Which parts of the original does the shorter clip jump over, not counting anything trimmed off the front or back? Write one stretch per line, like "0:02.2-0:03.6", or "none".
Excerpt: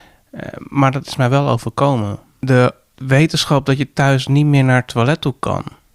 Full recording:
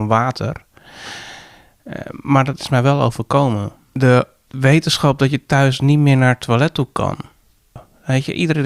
none